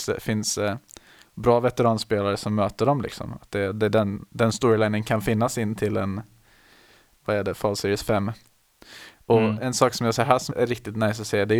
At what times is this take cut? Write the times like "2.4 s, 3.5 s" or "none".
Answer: 7.2 s, 10.5 s